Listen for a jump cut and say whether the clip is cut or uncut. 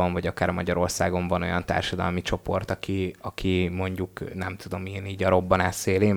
uncut